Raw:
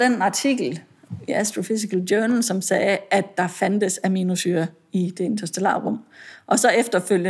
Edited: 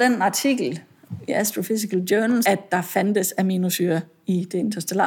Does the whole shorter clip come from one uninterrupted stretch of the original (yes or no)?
no